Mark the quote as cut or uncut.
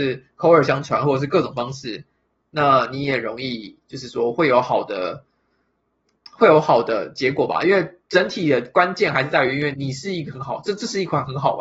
cut